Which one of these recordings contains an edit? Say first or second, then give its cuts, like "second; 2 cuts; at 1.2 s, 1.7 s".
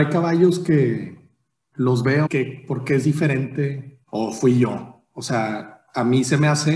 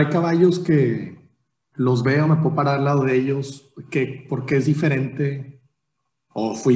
first; 2 cuts; at 2.3 s, 4.0 s